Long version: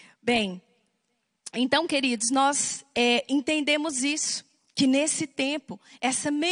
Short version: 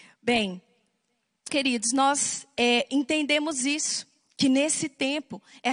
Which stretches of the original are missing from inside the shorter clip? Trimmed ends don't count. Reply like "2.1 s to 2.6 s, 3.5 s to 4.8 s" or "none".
1.5 s to 1.9 s